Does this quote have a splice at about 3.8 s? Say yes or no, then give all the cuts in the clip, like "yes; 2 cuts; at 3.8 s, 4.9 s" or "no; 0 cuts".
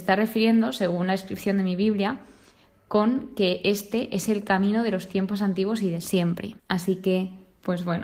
no; 1 cut; at 6.6 s